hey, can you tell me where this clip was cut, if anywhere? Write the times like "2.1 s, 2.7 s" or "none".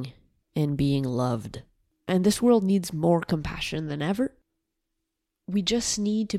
2.0 s